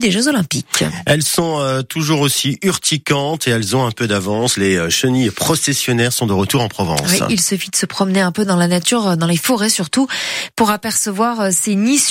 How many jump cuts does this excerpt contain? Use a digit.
0